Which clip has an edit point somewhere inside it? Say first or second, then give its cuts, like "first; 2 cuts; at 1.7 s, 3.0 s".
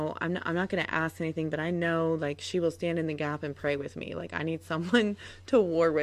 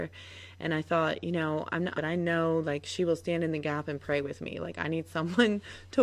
second; 1 cut; at 2.0 s